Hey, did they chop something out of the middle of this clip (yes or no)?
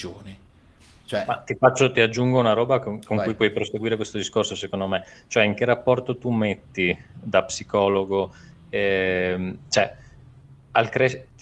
yes